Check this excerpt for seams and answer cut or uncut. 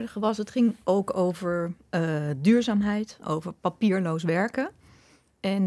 cut